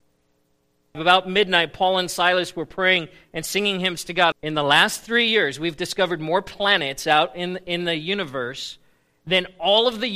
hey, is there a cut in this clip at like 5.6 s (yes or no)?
no